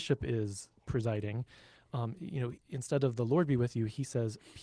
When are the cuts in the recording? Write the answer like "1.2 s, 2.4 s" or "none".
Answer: none